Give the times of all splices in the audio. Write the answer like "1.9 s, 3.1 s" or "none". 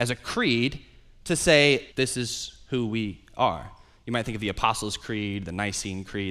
1.9 s